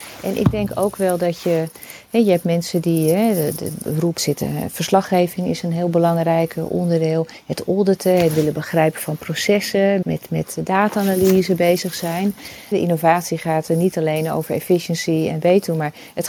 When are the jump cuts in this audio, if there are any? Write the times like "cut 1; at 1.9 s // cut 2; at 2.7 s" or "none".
cut 1; at 4.2 s // cut 2; at 10.0 s // cut 3; at 12.7 s